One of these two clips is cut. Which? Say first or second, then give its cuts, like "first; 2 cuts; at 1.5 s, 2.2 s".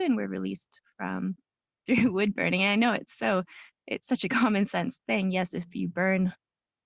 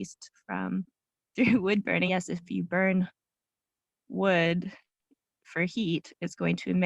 second; 1 cut; at 2.1 s